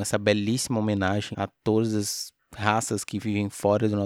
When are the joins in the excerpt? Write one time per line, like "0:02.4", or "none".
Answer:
0:01.3